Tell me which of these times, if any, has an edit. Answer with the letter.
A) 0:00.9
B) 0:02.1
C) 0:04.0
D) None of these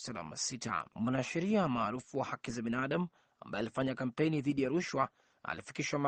A